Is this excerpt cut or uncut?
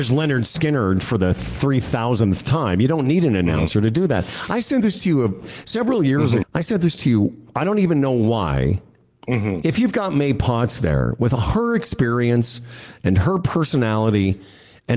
cut